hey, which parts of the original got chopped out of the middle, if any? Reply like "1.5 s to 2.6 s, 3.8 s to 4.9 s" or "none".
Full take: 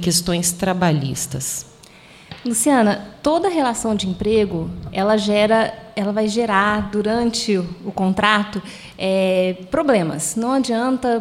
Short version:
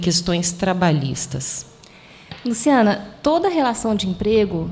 none

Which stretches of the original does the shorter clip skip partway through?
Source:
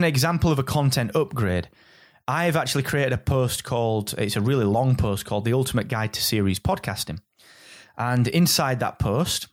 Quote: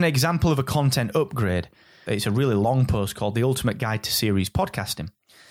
2.1 s to 4.2 s

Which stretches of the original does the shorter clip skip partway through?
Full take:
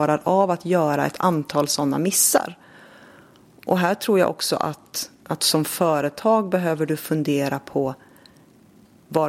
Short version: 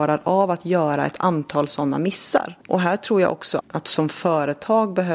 2.6 s to 3.6 s, 4.6 s to 5.2 s

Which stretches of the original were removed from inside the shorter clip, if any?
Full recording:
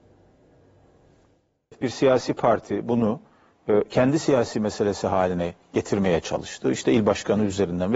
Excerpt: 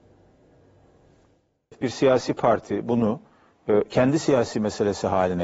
none

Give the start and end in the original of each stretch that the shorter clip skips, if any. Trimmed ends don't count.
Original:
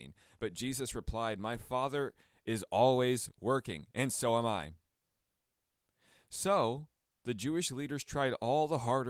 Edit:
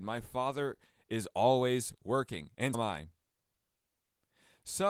4.1 s to 4.4 s

